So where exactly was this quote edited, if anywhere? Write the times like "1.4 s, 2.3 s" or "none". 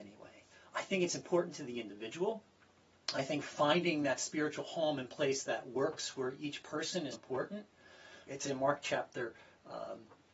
7.1 s, 8.3 s

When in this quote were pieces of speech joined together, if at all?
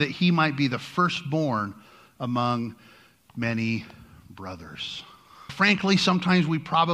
5.5 s

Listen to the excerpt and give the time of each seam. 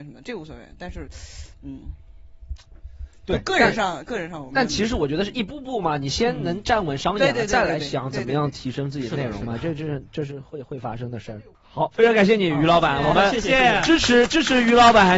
none

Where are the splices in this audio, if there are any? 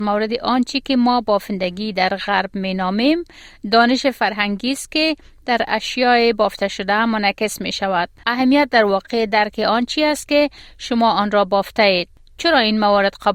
8.2 s

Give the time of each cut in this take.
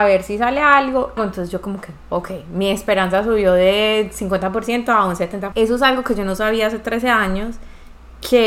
1.2 s, 5.5 s

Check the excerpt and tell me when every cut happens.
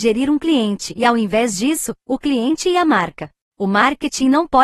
2.0 s

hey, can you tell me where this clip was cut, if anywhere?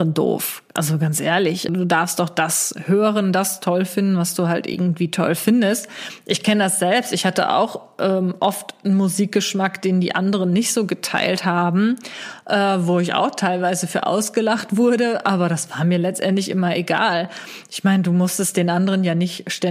1.7 s

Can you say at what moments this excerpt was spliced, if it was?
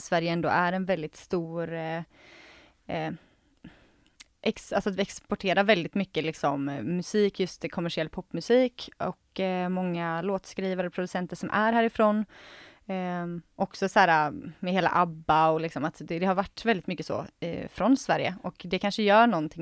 none

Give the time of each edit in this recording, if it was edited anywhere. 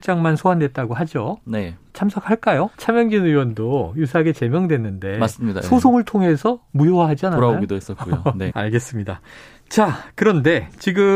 2.7 s, 8.5 s

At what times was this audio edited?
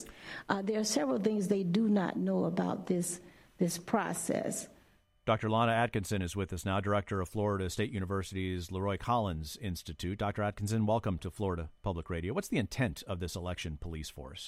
none

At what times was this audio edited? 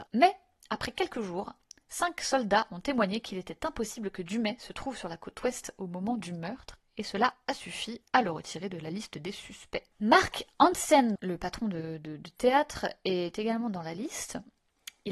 11.2 s

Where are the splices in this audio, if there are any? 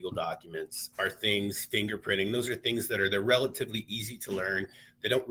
0.9 s

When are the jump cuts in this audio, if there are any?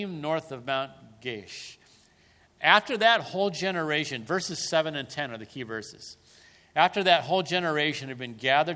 none

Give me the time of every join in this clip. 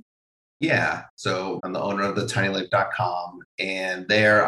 1.6 s

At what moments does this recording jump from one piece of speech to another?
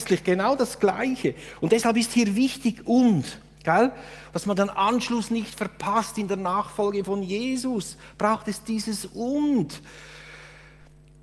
4.3 s

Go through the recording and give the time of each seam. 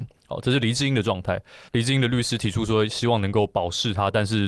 1.7 s

